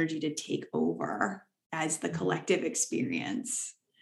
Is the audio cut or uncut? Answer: uncut